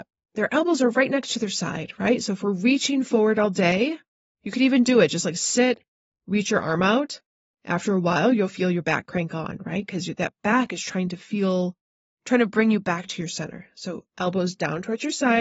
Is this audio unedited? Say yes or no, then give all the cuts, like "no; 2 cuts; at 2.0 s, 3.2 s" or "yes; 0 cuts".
yes; 0 cuts